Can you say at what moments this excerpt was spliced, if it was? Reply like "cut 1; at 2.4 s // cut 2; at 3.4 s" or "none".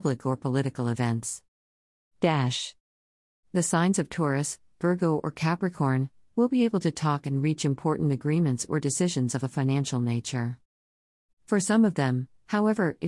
cut 1; at 11.3 s